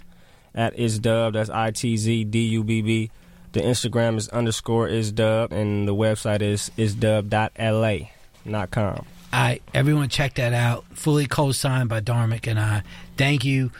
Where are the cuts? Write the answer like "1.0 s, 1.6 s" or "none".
5.5 s